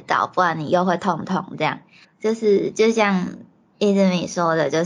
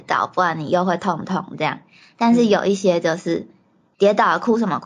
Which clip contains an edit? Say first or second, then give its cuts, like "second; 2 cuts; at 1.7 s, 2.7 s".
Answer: first; 1 cut; at 2.0 s